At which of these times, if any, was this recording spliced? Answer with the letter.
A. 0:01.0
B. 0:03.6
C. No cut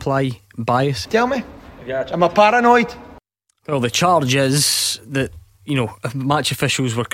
A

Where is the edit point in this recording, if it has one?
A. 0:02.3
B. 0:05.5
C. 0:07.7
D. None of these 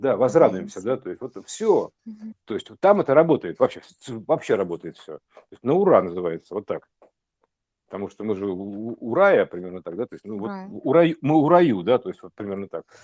A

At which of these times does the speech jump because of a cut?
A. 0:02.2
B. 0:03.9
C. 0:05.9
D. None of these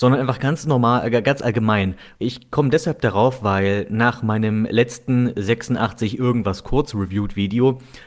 A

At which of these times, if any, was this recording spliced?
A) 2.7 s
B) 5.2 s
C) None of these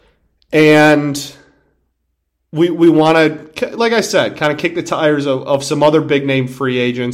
C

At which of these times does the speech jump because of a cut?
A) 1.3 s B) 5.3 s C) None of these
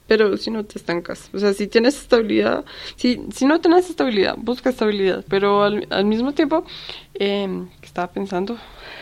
B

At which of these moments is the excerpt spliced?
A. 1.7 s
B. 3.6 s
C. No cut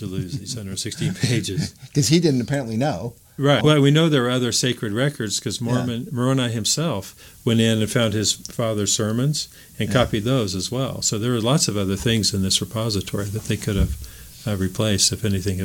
B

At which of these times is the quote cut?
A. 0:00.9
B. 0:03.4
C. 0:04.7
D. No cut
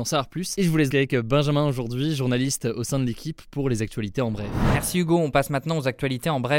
A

